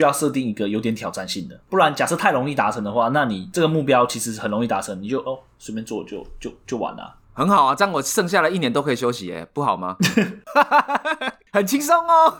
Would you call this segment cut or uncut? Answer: uncut